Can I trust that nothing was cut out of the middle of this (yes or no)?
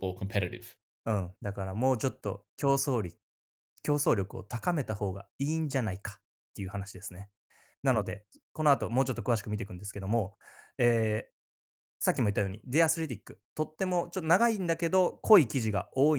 yes